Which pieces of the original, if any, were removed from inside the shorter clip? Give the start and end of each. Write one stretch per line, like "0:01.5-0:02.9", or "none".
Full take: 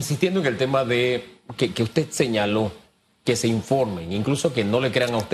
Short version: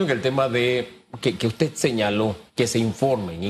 0:02.8-0:03.2